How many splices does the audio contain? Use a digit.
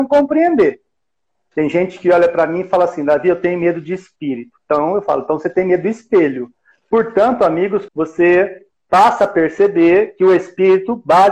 2